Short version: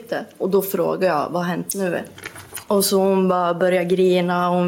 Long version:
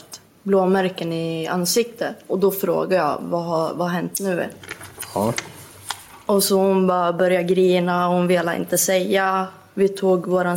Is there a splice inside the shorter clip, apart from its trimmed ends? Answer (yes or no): yes